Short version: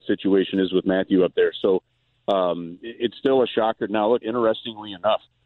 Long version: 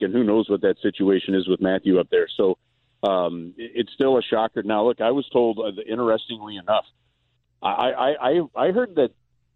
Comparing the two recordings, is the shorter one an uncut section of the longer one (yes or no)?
no